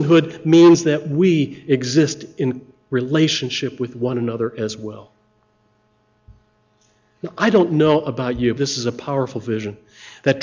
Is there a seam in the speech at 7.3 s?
no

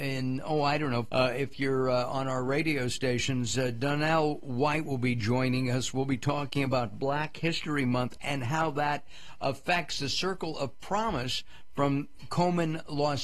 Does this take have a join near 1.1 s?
yes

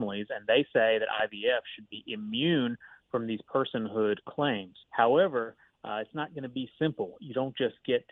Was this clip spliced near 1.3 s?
no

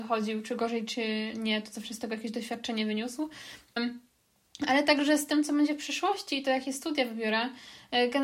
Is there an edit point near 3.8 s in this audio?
yes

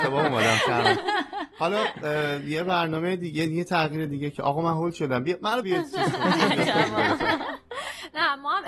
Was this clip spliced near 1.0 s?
no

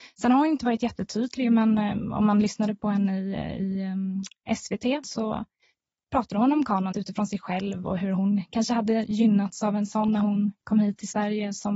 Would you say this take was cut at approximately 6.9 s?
yes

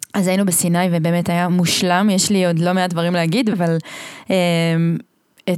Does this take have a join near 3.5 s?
yes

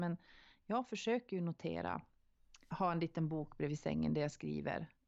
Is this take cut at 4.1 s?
no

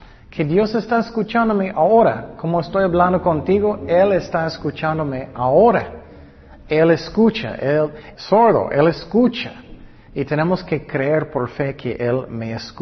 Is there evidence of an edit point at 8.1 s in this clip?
yes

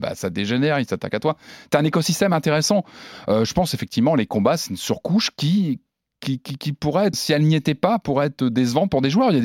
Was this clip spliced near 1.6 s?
no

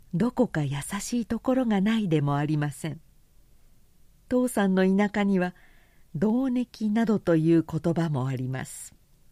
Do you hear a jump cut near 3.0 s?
no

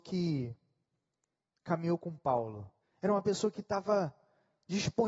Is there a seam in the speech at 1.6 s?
no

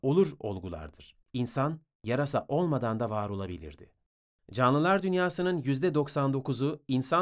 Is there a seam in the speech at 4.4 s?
no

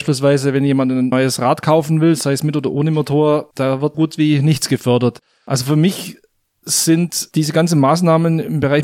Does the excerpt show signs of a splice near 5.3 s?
no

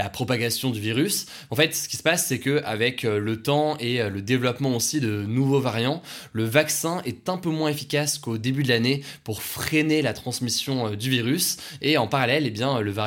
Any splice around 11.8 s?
no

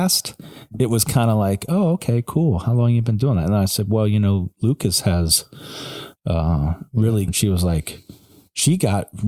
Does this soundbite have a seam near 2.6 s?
no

